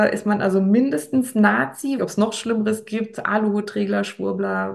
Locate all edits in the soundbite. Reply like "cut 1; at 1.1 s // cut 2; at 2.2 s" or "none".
cut 1; at 2.0 s